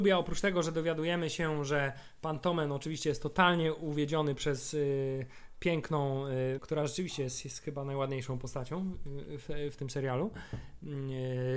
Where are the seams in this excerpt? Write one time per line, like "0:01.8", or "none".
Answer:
0:06.6